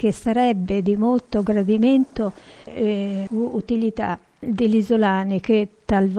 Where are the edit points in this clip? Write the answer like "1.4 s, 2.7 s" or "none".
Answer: 3.3 s